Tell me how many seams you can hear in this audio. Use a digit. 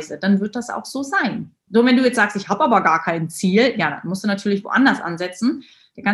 1